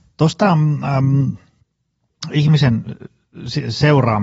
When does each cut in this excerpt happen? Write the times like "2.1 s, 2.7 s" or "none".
none